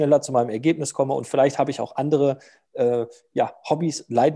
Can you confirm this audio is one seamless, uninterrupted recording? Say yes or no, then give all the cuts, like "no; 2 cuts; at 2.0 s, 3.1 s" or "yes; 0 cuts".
yes; 0 cuts